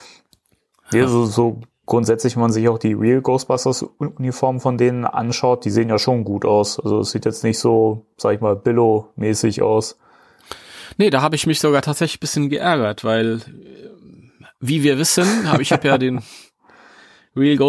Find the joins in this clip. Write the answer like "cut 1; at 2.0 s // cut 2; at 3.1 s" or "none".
none